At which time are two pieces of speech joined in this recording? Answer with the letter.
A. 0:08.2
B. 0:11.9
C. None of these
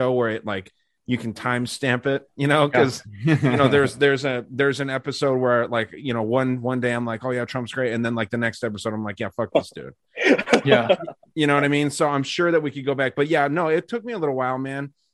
C